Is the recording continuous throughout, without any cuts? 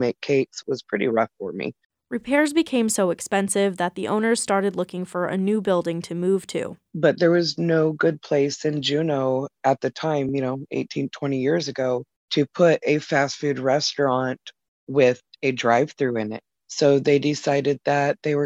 yes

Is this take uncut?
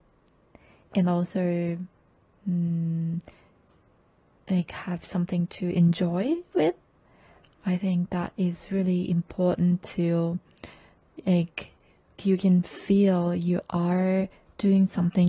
no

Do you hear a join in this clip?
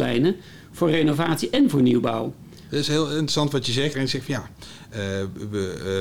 yes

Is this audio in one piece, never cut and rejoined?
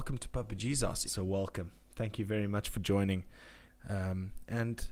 no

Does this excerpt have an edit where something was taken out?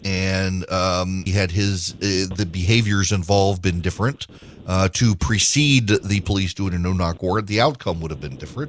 yes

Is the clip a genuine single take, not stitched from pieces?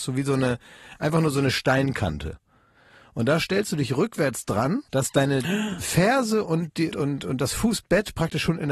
no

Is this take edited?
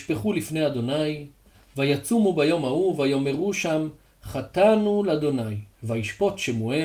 yes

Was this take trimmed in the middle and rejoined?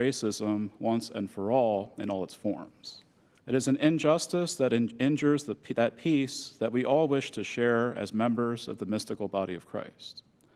yes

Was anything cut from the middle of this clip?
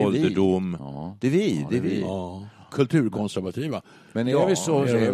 no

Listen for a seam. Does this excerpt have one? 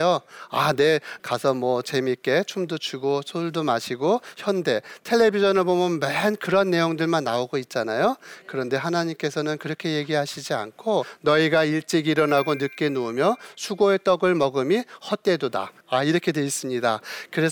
yes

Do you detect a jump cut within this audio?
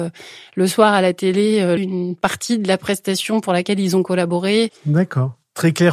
yes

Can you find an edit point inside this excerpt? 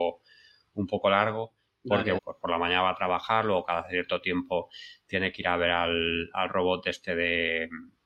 yes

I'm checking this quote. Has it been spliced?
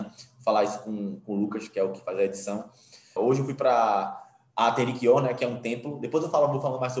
yes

